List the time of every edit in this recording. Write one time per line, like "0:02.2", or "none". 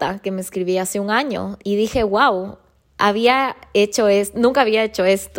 none